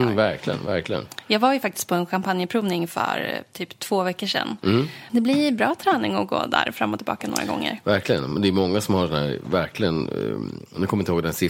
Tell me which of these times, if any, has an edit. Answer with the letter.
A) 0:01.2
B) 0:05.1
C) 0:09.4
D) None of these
B